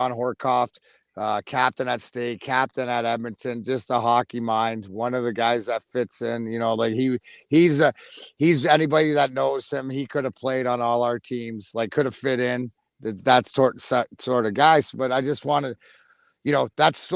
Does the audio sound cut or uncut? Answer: uncut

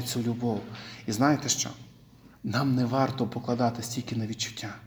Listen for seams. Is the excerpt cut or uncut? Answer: uncut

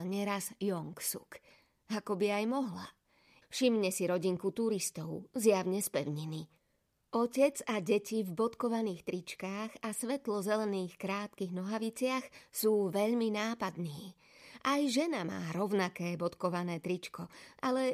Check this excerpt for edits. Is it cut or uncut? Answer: cut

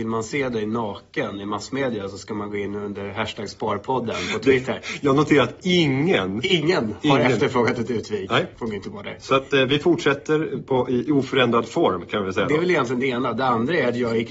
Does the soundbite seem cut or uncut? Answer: uncut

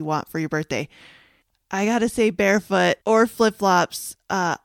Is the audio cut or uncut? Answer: cut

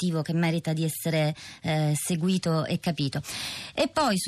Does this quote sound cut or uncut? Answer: uncut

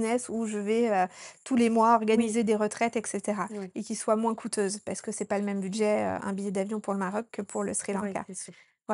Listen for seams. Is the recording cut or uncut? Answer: cut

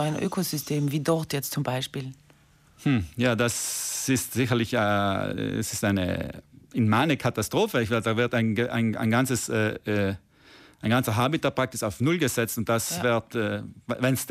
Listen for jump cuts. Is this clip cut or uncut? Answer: uncut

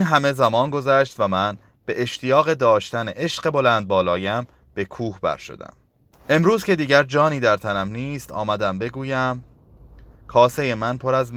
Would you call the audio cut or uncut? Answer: cut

